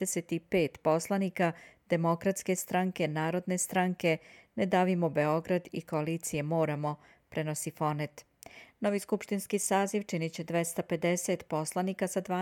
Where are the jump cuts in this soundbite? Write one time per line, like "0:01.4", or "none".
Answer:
0:08.7

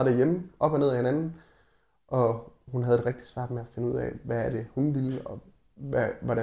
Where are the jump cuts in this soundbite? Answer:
none

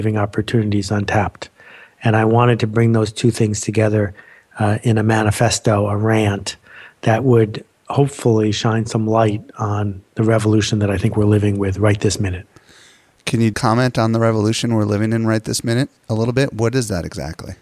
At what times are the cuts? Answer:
0:13.5

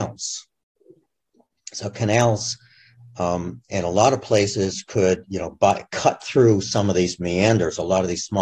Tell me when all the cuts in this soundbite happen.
none

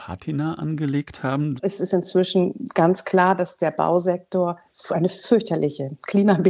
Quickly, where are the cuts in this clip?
0:01.6
0:04.7

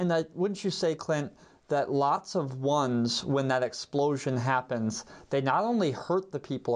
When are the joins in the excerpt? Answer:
none

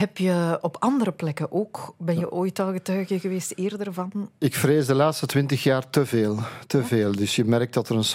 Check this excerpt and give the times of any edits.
none

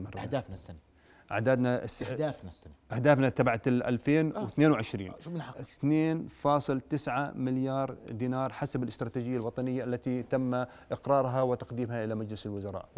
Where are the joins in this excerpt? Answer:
none

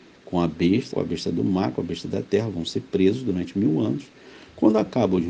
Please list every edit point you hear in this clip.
0:00.9

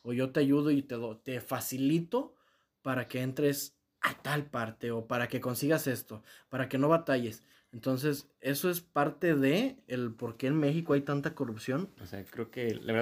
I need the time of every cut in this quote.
0:07.5
0:12.0

